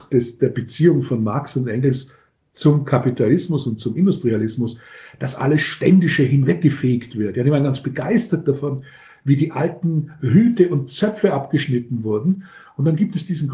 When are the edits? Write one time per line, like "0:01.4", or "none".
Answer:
none